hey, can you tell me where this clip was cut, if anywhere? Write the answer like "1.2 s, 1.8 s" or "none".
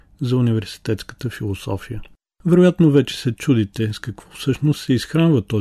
2.3 s